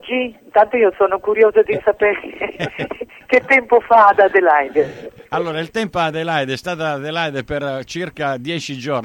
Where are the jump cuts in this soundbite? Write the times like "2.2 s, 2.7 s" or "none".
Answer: none